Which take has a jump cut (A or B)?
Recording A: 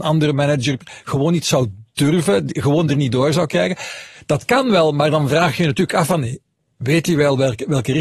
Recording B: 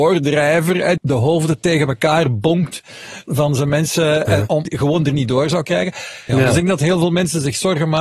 B